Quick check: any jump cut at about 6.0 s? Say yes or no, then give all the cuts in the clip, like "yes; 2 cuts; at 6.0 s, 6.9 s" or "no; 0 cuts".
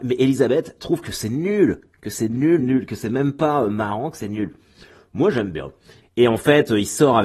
yes; 2 cuts; at 2.6 s, 6.0 s